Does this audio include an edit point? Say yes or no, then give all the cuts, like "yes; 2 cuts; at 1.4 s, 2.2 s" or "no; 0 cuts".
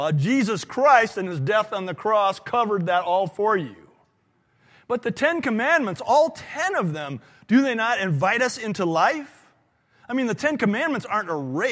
no; 0 cuts